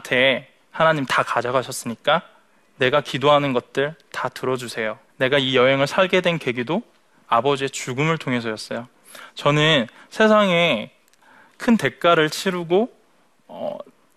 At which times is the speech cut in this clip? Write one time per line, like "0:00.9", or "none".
0:05.1